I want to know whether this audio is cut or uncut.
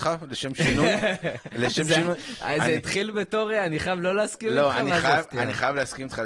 uncut